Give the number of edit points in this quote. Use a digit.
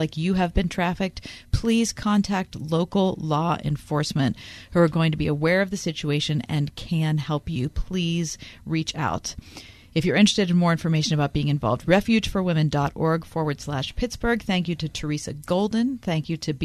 0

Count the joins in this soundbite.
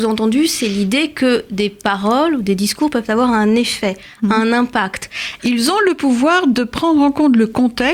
1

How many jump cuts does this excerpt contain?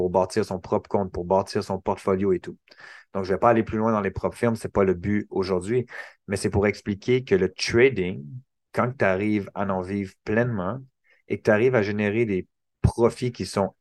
0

